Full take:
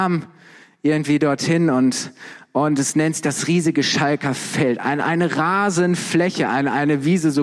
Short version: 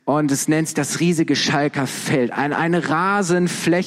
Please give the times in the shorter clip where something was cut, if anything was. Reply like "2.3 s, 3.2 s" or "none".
none